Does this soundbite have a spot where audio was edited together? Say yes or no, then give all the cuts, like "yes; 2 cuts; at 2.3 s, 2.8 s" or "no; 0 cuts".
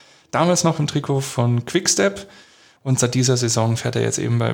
no; 0 cuts